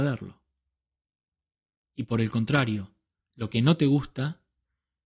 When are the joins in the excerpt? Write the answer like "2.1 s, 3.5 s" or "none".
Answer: none